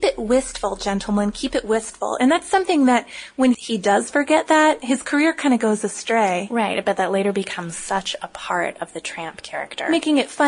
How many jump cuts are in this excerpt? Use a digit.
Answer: 1